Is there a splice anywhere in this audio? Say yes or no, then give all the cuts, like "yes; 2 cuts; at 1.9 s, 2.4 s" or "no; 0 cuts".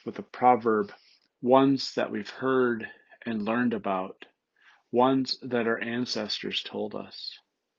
yes; 1 cut; at 1.3 s